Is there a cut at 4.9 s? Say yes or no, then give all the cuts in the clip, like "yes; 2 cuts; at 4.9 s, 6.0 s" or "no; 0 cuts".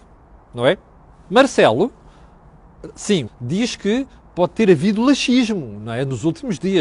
no; 2 cuts; at 1.2 s, 3.3 s